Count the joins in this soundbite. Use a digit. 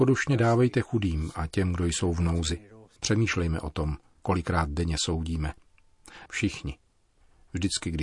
2